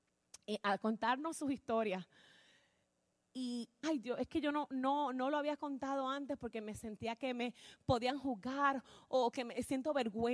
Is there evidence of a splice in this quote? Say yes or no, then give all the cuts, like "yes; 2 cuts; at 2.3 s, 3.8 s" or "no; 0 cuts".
yes; 1 cut; at 3.8 s